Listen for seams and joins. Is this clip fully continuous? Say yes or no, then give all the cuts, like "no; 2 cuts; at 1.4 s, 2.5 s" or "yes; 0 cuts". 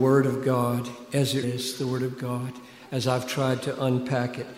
no; 1 cut; at 1.4 s